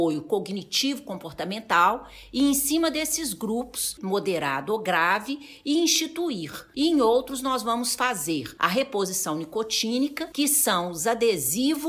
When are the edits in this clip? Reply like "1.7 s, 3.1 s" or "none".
4.0 s, 6.7 s